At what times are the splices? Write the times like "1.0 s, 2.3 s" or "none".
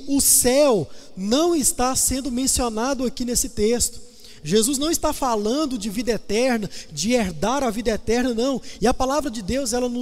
8.8 s

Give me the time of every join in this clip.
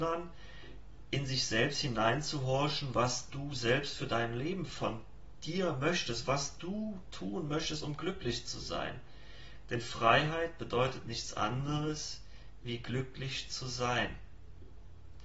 none

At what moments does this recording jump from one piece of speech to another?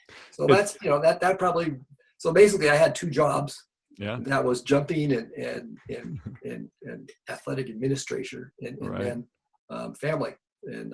none

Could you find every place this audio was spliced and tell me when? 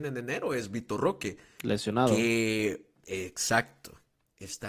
none

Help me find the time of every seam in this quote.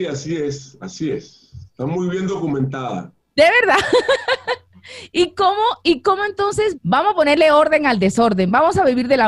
6.7 s

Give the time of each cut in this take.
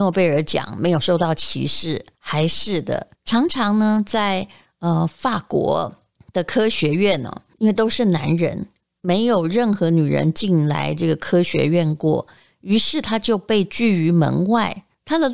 none

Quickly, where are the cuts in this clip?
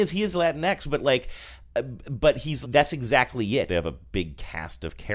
2.6 s, 3.7 s

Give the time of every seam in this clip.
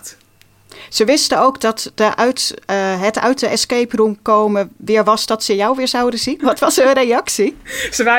6.4 s

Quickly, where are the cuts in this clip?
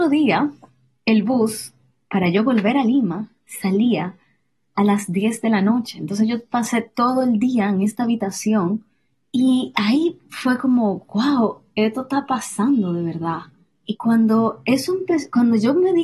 none

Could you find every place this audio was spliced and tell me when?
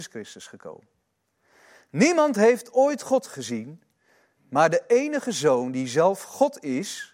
none

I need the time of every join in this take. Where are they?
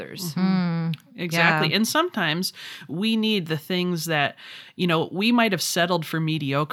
none

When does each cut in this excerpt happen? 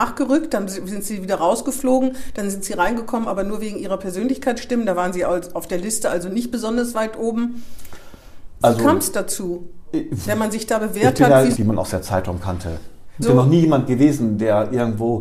10.2 s, 11.5 s, 13.2 s

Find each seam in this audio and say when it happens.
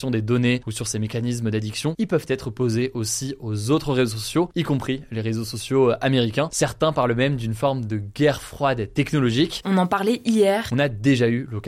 6.5 s, 9.6 s, 10.7 s

